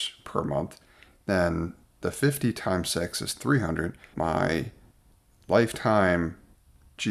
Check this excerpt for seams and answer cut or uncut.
cut